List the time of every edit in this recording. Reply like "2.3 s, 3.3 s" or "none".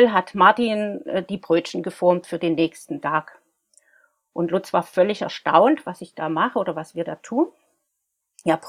none